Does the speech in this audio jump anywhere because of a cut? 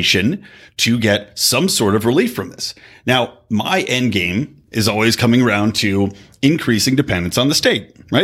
no; 0 cuts

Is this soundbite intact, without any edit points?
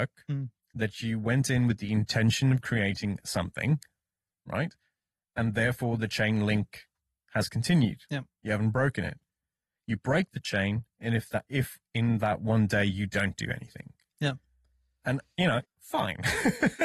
no; 1 cut; at 15.6 s

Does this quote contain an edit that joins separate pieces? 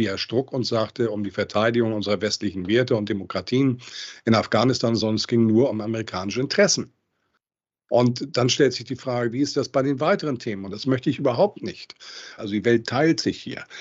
yes; 2 cuts; at 10.7 s, 12.4 s

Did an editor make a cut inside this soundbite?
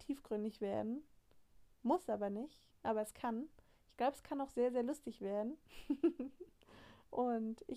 no; 0 cuts

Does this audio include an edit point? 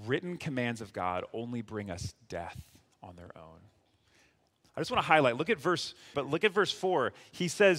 yes; 1 cut; at 6.1 s

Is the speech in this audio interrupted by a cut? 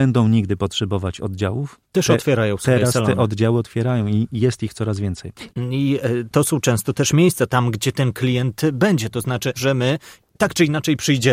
yes; 3 cuts; at 5.5 s, 7.5 s, 9.6 s

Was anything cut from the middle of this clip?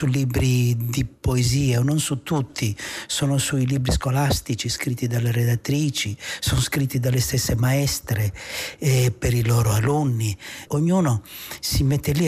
yes; 1 cut; at 10.7 s

